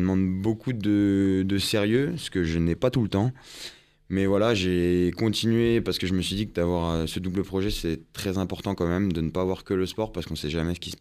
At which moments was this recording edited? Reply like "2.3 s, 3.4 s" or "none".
none